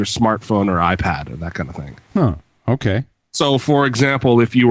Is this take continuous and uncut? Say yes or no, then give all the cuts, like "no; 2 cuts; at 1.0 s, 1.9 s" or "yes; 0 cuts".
yes; 0 cuts